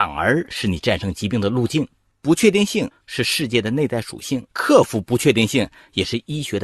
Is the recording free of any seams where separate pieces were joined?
no; 2 cuts; at 2.1 s, 4.5 s

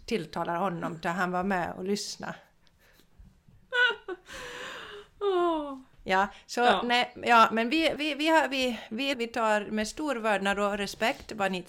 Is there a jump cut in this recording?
yes; 2 cuts; at 8.0 s, 9.1 s

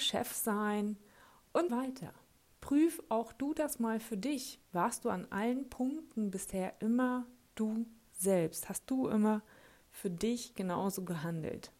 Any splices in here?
yes; 1 cut; at 1.7 s

